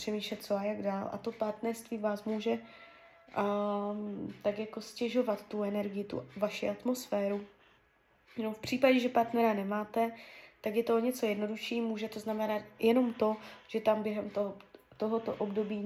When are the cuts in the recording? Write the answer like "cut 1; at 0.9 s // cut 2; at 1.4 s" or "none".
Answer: none